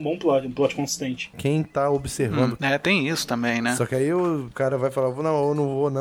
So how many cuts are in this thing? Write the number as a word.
two